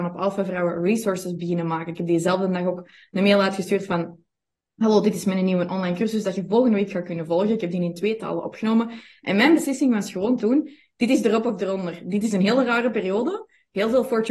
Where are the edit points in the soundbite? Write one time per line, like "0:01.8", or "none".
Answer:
none